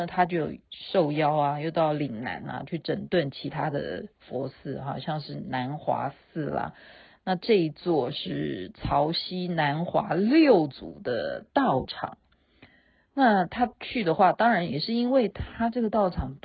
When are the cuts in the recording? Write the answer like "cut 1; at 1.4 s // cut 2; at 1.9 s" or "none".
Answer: none